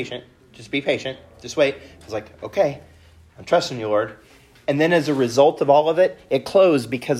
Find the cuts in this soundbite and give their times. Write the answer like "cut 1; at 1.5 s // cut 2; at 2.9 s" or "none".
none